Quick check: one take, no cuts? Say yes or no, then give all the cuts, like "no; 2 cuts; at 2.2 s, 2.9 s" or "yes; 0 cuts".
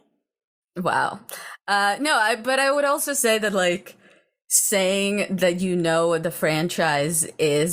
yes; 0 cuts